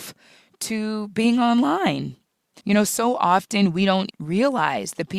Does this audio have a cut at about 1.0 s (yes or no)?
no